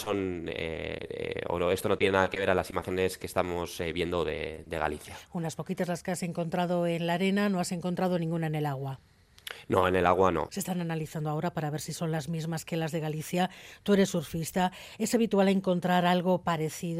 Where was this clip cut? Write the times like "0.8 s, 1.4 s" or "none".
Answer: 10.5 s